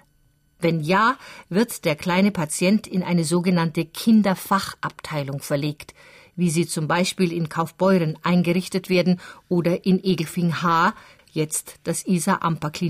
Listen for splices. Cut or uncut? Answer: cut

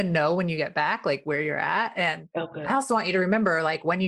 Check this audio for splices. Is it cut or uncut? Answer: uncut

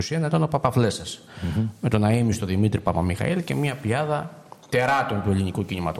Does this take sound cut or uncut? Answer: uncut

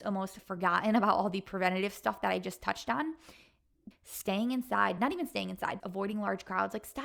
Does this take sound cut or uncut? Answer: cut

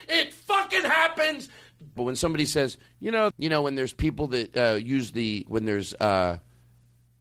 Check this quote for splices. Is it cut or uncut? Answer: cut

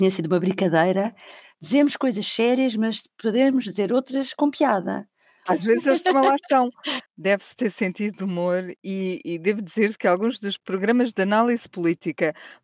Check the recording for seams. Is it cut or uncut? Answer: cut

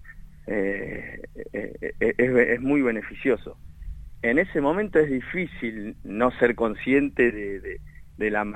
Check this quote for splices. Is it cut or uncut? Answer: uncut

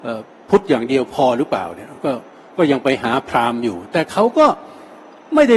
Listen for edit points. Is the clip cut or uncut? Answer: uncut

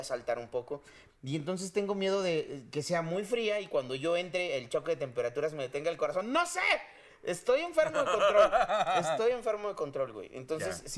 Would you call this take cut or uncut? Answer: cut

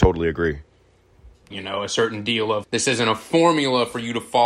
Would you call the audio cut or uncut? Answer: cut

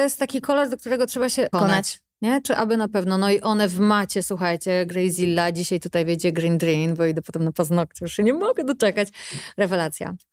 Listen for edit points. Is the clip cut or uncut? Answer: cut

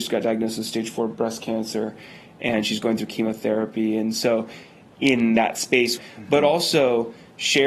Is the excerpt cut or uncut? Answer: cut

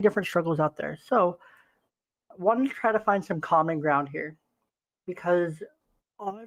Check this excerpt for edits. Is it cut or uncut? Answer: uncut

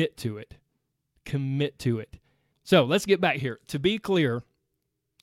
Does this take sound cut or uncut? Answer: cut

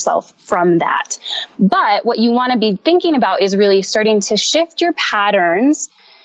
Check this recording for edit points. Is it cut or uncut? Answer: uncut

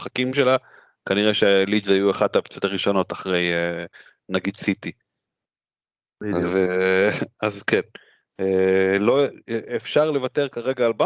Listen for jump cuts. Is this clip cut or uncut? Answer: uncut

